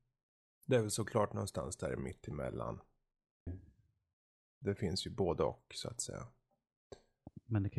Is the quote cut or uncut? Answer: cut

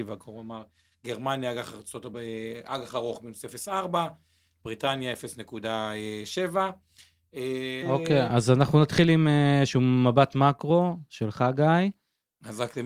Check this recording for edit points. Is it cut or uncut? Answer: cut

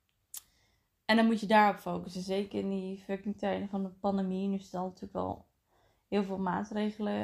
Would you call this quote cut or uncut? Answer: uncut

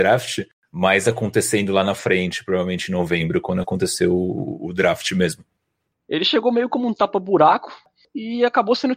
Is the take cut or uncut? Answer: cut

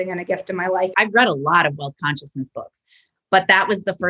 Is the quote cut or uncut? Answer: cut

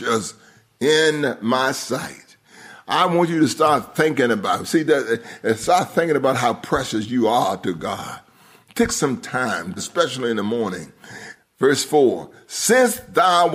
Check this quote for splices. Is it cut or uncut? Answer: cut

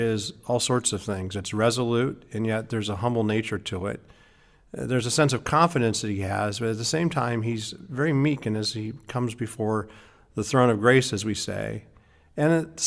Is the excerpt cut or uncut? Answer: uncut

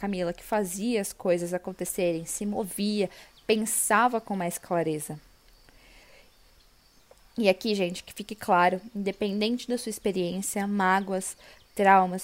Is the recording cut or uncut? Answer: uncut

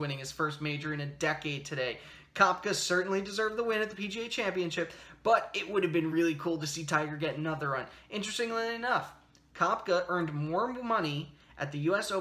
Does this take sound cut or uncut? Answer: uncut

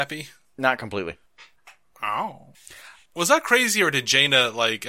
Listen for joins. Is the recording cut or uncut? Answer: uncut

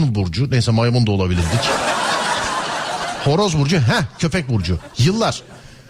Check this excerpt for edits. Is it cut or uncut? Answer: uncut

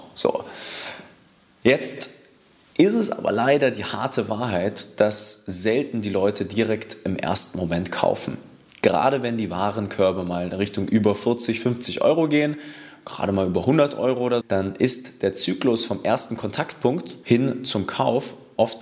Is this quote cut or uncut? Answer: cut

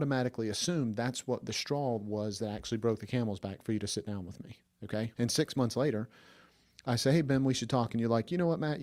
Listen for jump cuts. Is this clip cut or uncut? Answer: cut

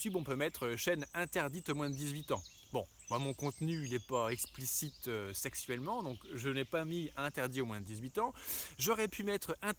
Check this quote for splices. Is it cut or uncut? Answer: uncut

